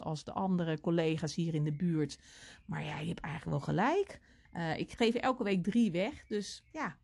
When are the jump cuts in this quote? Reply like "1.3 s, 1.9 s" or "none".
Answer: 4.5 s